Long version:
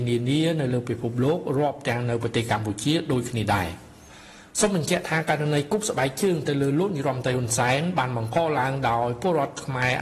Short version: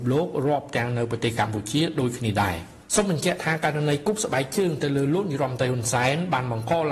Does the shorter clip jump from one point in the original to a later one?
yes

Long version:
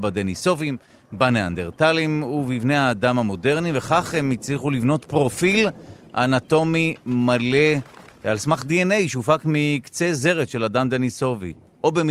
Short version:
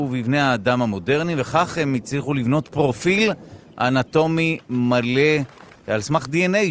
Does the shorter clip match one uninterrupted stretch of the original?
yes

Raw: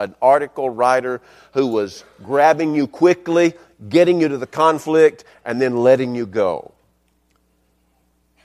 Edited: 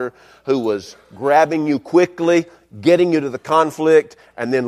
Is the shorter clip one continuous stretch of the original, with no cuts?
yes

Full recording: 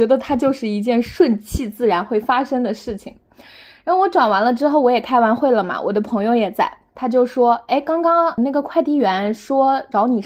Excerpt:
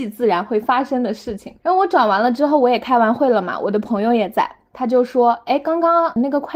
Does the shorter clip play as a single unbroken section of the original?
no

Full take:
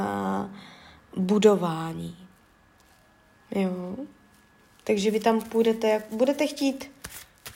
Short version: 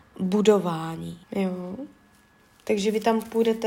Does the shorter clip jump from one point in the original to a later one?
yes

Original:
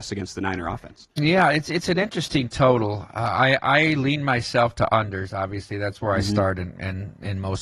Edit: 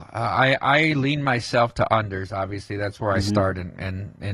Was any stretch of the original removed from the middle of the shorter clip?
no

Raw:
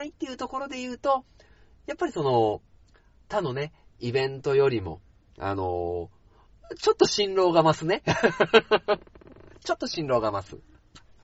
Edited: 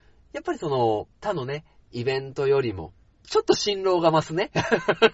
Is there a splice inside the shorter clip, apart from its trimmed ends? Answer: yes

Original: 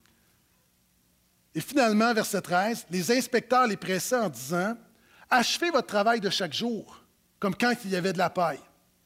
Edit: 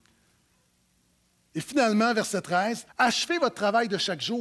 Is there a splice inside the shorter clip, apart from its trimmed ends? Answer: yes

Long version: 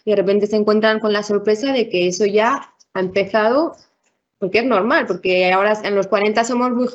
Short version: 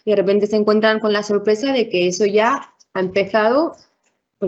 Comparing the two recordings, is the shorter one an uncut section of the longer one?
yes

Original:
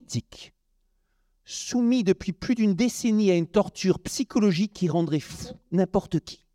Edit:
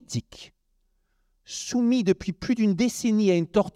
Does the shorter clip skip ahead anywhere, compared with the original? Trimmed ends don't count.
no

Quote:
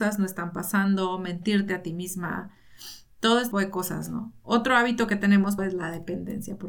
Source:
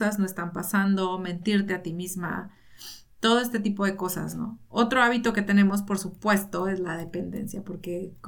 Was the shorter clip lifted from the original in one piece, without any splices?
no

